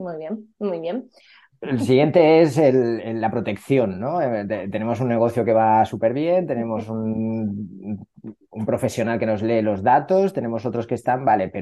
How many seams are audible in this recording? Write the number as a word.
one